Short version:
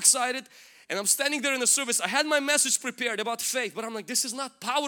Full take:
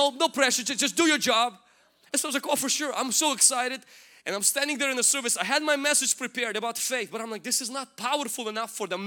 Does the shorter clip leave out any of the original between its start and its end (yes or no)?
no